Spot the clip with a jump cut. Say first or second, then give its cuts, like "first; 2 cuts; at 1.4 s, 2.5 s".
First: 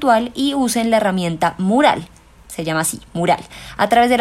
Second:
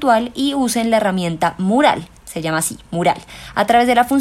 second; 1 cut; at 2.2 s